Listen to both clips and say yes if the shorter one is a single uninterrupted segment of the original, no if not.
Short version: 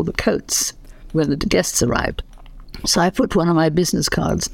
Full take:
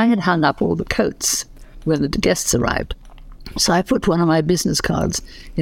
yes